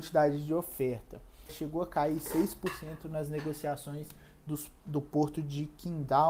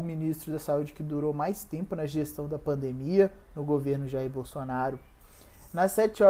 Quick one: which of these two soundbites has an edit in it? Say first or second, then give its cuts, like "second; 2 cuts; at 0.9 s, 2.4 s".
first; 1 cut; at 1.5 s